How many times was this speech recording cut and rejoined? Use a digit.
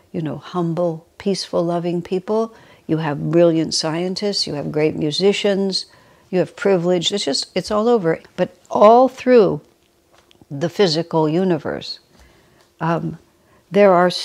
2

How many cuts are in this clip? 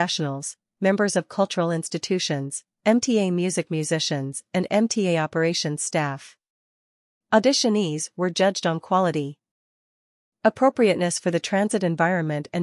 0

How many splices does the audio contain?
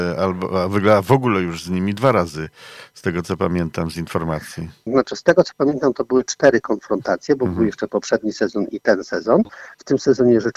1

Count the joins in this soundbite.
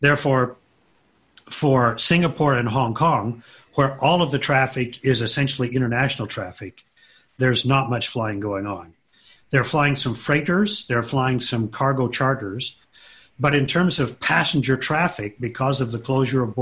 1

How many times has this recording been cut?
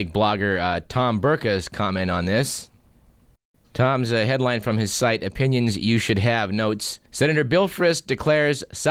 1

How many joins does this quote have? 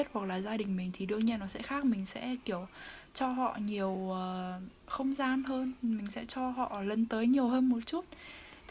1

